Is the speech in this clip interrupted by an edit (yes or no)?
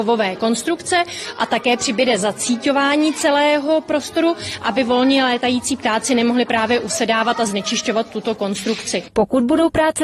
no